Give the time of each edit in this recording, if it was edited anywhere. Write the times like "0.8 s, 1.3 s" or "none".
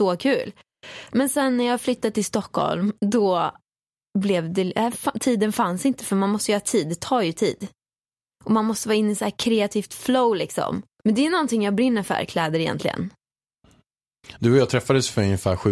11.0 s, 14.4 s